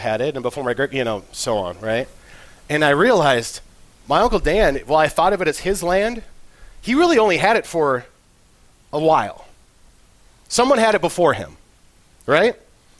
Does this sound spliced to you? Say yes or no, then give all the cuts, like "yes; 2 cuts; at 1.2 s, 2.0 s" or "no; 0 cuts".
no; 0 cuts